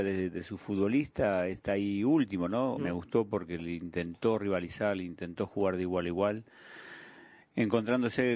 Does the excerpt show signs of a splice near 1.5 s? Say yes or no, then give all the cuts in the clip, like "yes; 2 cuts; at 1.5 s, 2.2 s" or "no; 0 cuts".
no; 1 cut; at 2.7 s